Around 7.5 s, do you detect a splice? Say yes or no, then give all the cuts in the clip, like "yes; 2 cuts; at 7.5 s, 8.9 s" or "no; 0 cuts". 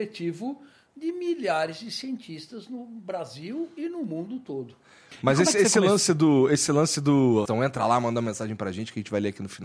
yes; 1 cut; at 7.5 s